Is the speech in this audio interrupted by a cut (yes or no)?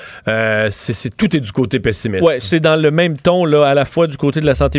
no